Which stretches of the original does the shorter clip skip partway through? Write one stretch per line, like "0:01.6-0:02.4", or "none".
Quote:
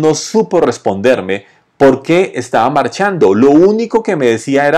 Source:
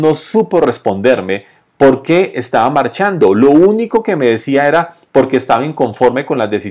none